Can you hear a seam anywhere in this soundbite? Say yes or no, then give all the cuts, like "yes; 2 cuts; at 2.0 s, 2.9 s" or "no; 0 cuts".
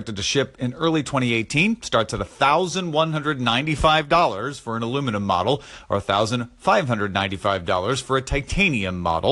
no; 0 cuts